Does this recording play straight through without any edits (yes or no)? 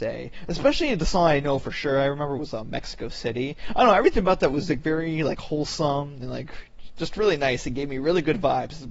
yes